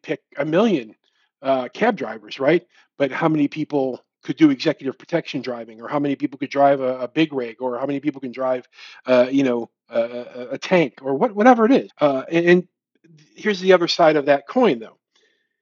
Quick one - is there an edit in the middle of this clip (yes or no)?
yes